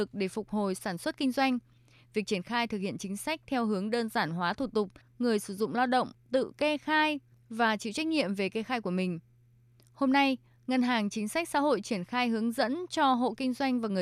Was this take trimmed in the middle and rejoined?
yes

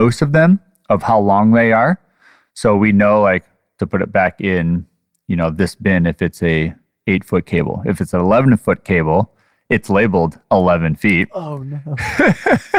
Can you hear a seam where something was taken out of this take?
no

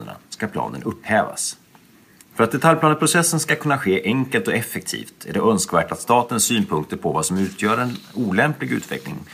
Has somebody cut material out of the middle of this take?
yes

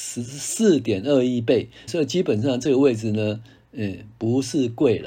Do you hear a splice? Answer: yes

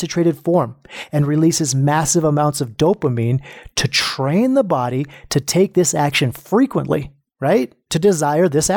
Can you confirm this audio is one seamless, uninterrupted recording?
yes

